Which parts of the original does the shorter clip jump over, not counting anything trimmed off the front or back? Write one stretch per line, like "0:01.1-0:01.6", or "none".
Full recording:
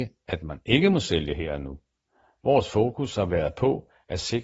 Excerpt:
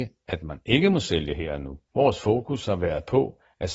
0:01.9-0:02.4